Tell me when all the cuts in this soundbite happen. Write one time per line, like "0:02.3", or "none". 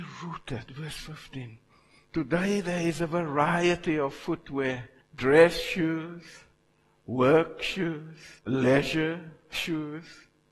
0:05.0
0:08.4